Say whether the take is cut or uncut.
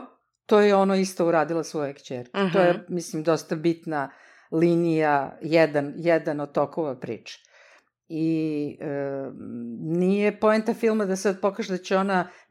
uncut